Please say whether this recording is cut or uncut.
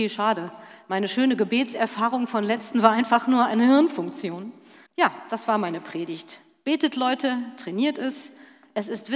cut